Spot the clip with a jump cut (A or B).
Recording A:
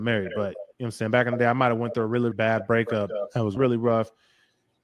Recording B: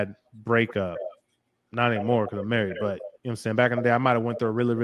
A